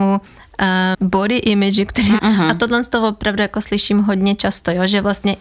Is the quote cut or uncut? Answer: cut